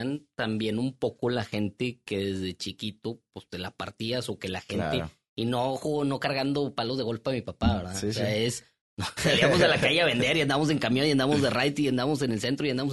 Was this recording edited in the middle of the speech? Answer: no; 0 cuts

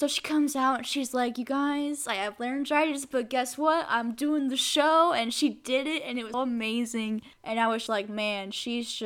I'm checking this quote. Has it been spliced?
yes; 2 cuts; at 6.3 s, 7.9 s

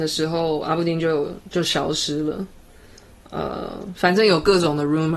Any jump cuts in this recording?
no; 0 cuts

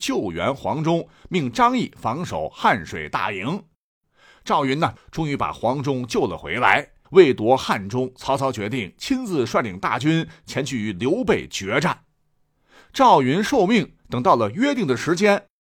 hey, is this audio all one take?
no; 3 cuts; at 5.0 s, 7.0 s, 12.8 s

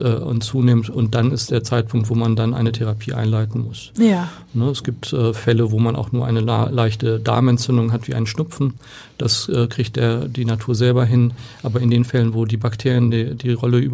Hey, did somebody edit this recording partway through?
no; 0 cuts

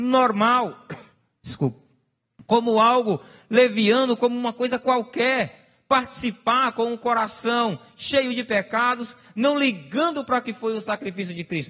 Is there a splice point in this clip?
no; 0 cuts

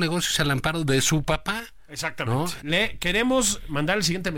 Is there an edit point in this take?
yes; 1 cut; at 2.6 s

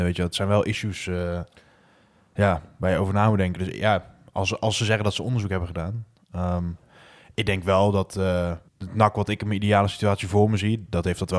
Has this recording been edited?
yes; 1 cut; at 8.7 s

